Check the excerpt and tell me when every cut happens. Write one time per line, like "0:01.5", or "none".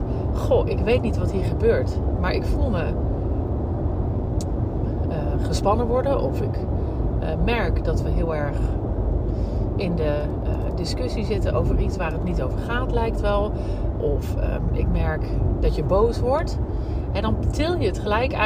none

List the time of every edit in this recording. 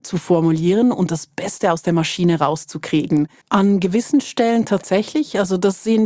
0:03.4

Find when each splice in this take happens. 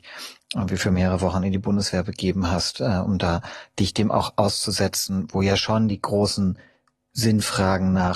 none

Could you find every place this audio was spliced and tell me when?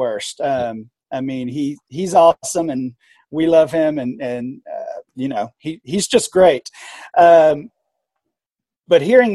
0:05.1

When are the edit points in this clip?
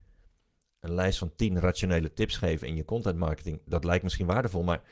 none

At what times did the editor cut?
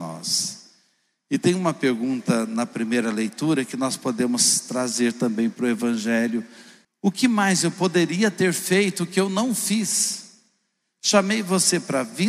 0:06.8

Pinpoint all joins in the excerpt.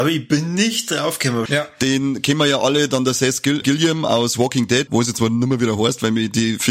0:01.5
0:03.6
0:04.9

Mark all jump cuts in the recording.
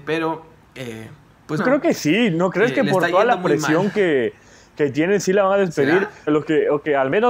0:01.6
0:06.3

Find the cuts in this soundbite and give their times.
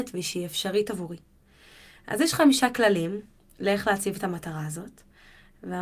none

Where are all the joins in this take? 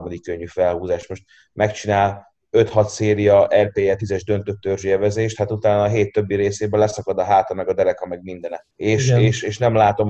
0:08.7

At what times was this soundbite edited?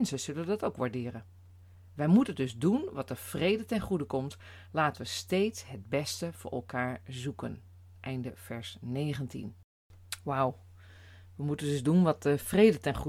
none

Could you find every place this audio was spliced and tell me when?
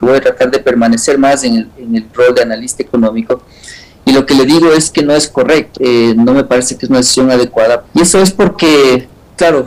0:05.8
0:07.8

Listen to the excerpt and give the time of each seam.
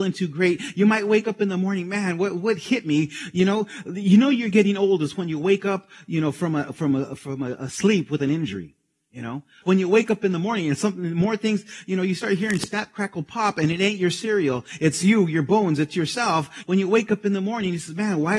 0:09.6
0:16.6

